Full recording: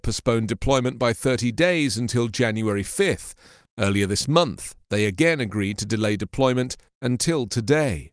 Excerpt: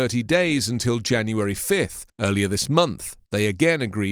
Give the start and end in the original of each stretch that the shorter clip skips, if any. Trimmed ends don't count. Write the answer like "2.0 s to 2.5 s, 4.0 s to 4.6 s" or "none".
3.4 s to 3.7 s